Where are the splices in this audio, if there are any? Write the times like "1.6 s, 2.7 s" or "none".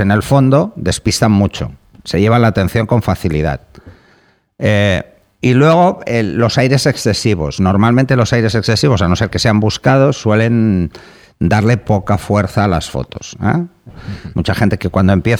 13.9 s